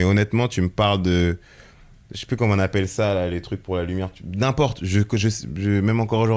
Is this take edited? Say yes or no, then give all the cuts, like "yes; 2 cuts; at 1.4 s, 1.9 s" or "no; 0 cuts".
no; 0 cuts